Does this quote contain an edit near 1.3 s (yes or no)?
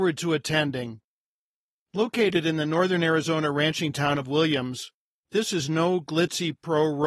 no